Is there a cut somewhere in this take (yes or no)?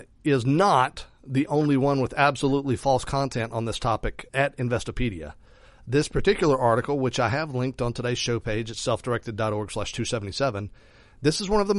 yes